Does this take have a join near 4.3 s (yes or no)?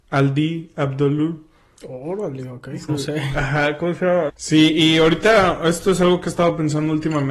yes